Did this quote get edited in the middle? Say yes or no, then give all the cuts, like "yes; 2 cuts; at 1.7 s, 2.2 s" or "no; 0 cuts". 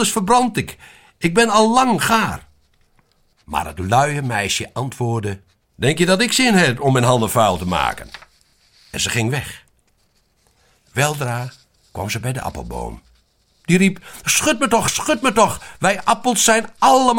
no; 0 cuts